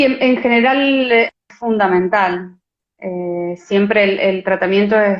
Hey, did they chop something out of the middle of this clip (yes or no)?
no